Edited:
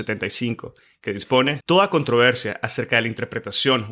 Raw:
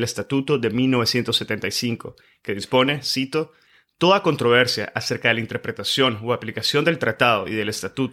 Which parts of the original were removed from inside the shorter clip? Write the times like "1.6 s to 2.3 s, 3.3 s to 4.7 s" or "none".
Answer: 3.0 s to 3.9 s